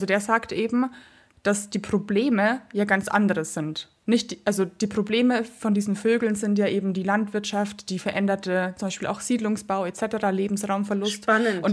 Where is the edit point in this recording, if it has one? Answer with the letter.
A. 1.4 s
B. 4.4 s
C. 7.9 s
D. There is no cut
D